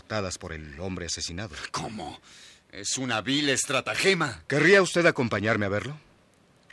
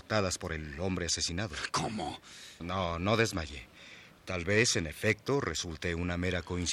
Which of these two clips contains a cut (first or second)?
second